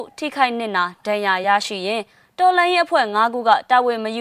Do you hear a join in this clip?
no; 0 cuts

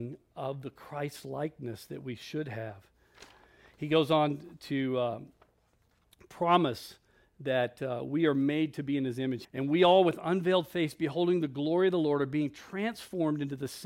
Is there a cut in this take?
yes; 1 cut; at 9.4 s

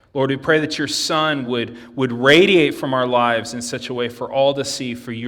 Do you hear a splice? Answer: no; 0 cuts

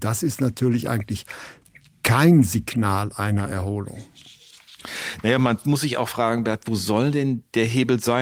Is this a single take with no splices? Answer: yes; 0 cuts

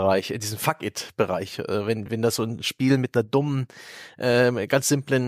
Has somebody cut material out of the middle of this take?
no; 0 cuts

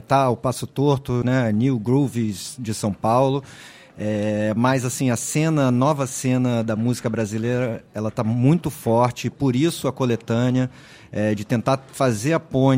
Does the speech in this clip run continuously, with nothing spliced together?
no; 1 cut; at 1.2 s

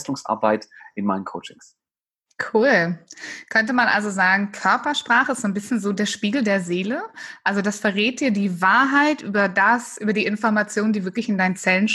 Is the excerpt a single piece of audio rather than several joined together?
yes; 0 cuts

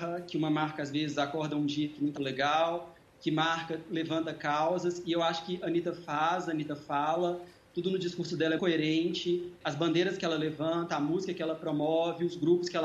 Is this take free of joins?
no; 2 cuts; at 2.2 s, 8.6 s

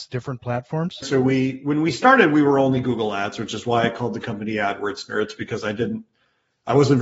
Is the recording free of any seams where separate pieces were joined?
no; 1 cut; at 1.0 s

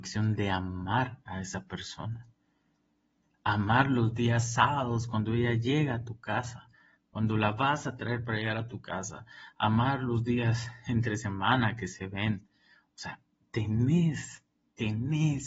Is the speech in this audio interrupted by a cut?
yes; 1 cut; at 3.2 s

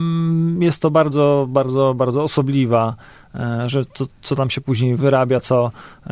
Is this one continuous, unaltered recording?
yes; 0 cuts

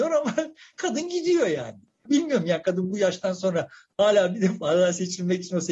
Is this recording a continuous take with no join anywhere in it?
no; 1 cut; at 2.1 s

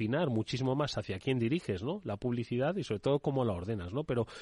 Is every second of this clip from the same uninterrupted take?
yes; 0 cuts

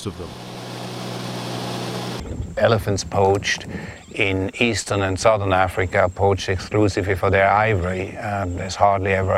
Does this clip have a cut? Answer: no; 0 cuts

